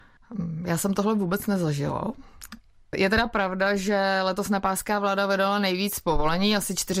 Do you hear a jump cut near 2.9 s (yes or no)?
yes